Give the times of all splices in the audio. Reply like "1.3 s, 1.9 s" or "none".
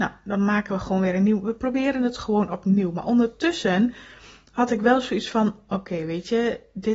none